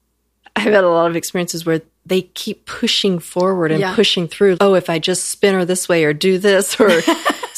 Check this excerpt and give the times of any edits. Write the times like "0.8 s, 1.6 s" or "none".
4.6 s